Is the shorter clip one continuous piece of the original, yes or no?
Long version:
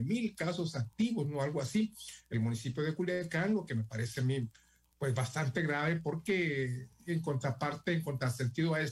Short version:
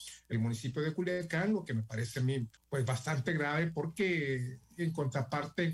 no